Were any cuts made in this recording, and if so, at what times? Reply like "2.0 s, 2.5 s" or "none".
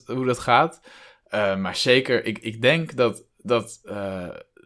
none